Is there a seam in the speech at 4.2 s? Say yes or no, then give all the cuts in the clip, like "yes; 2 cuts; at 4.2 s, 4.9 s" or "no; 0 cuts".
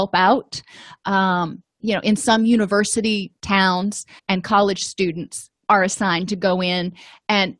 yes; 2 cuts; at 4.2 s, 5.7 s